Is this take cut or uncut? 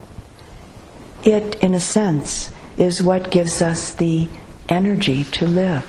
uncut